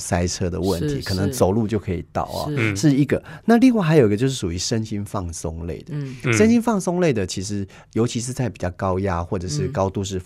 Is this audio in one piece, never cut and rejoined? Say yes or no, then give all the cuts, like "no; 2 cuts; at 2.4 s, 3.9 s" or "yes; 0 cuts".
yes; 0 cuts